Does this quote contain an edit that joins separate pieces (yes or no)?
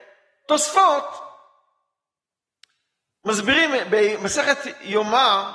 no